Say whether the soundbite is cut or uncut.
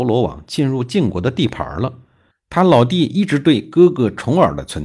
cut